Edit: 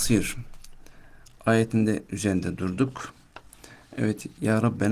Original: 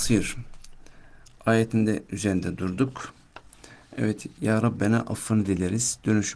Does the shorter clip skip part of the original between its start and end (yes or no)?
no